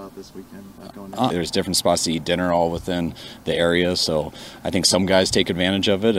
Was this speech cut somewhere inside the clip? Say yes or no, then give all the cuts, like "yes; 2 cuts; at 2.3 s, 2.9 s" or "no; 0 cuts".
yes; 1 cut; at 1.3 s